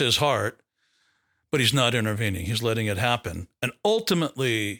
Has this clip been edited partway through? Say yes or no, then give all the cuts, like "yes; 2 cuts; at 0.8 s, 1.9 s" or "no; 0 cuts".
no; 0 cuts